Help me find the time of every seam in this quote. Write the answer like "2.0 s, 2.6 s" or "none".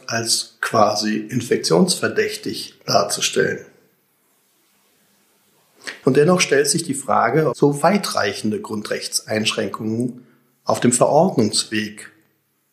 6.0 s, 7.5 s